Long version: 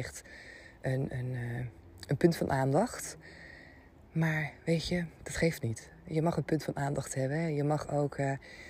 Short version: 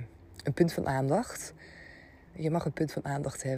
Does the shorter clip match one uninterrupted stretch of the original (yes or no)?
no